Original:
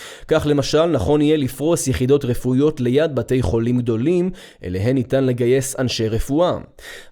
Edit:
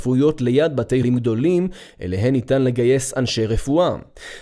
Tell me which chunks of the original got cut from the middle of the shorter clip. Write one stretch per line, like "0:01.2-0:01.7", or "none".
0:03.4-0:03.6